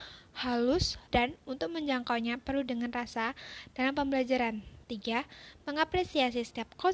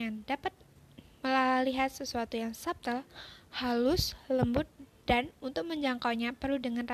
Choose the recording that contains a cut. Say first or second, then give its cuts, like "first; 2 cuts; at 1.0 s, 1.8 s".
first; 1 cut; at 1.1 s